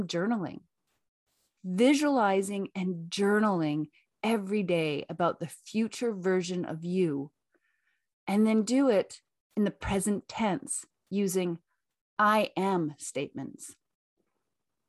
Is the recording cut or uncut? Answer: uncut